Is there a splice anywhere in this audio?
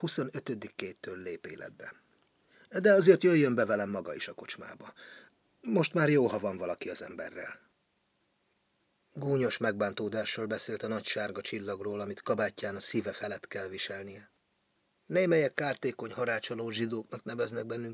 no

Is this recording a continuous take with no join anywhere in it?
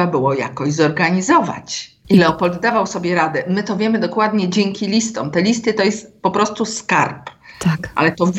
yes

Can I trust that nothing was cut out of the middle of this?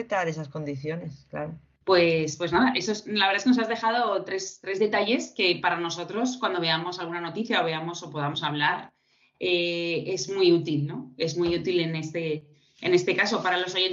yes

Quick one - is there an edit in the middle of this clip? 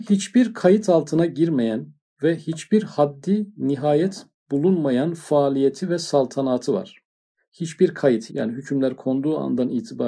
yes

